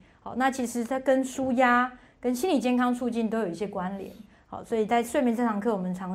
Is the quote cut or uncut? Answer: uncut